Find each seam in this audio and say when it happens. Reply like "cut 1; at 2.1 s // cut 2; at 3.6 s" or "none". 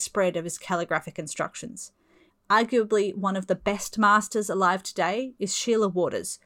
cut 1; at 2.3 s